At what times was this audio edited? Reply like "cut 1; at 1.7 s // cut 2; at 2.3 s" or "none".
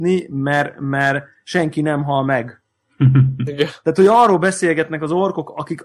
none